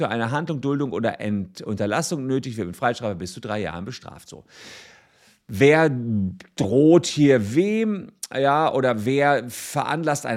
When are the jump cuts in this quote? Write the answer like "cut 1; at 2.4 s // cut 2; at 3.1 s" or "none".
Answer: none